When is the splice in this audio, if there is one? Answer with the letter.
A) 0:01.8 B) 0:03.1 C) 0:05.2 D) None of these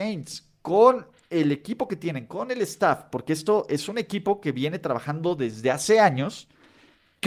B